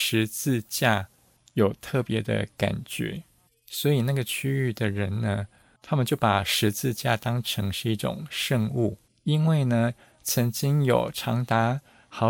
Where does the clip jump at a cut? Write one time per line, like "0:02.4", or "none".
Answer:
none